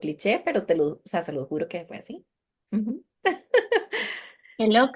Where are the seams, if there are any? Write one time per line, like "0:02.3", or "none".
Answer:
none